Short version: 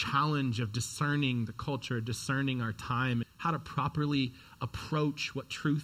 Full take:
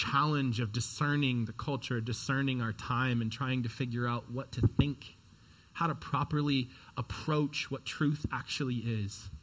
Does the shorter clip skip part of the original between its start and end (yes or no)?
yes